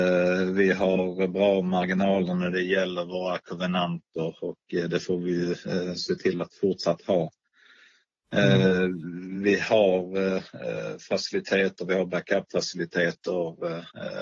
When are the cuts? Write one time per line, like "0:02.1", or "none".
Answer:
none